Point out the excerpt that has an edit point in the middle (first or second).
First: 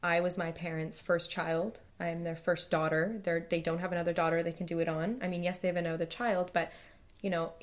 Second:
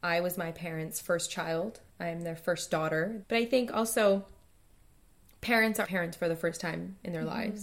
second